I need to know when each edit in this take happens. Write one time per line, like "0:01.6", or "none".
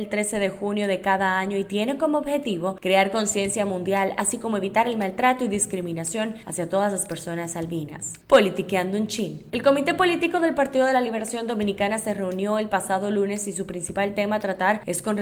none